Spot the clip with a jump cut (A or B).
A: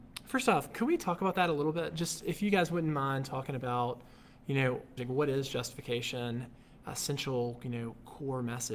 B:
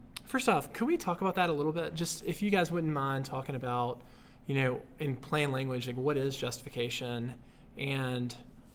A